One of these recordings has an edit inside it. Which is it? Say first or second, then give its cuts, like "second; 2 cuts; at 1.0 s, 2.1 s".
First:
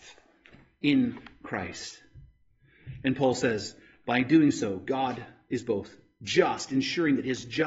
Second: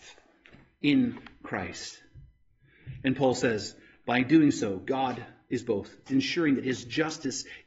second; 1 cut; at 6.1 s